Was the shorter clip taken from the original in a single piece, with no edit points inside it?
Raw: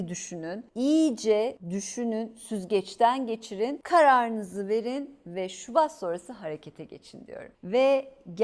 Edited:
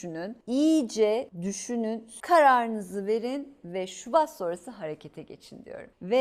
no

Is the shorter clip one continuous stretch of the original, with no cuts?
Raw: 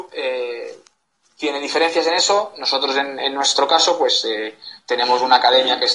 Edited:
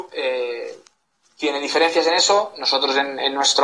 yes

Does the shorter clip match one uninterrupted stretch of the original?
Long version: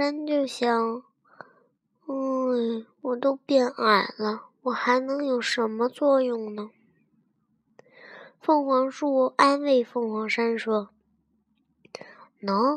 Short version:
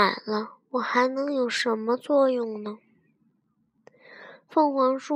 yes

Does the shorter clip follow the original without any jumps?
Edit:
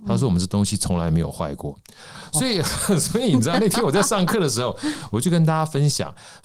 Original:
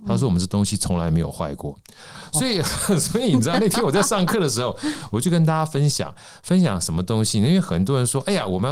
yes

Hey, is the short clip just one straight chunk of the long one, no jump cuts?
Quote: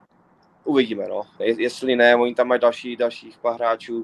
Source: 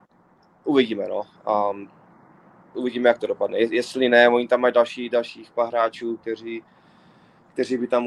no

